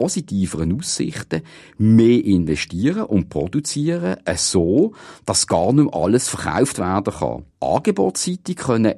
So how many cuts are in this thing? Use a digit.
1